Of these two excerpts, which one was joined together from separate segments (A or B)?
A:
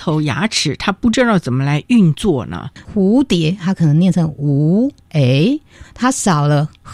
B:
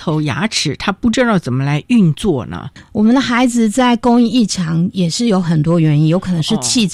A